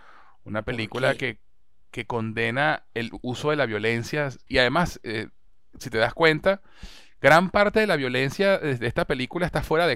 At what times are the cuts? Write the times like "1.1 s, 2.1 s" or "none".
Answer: 4.5 s